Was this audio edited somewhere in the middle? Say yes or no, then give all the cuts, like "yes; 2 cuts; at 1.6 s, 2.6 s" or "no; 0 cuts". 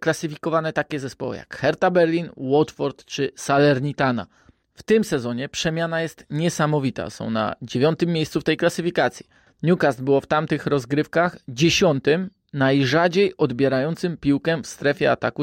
yes; 1 cut; at 9.5 s